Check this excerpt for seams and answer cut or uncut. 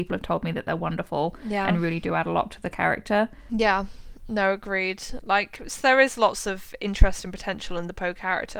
cut